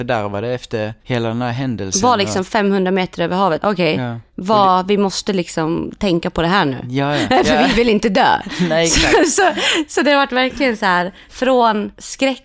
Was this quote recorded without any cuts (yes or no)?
no